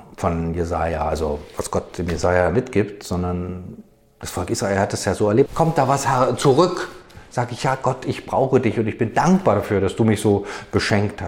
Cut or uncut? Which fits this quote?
cut